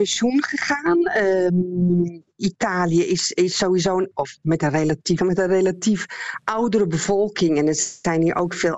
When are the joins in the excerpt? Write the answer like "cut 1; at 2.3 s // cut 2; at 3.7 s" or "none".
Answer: cut 1; at 4.1 s // cut 2; at 5.2 s